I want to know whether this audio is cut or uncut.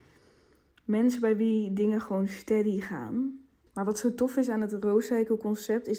cut